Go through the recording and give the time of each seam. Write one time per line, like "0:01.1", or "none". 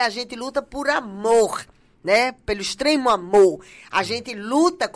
none